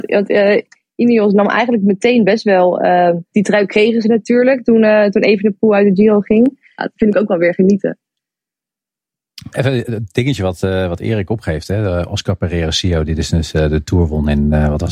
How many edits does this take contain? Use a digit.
3